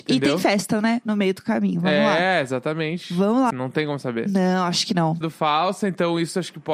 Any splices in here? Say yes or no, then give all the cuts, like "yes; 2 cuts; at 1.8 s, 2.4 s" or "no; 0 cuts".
yes; 2 cuts; at 3.5 s, 5.2 s